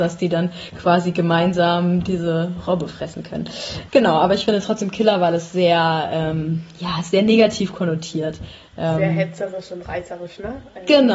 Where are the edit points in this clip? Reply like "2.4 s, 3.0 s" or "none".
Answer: none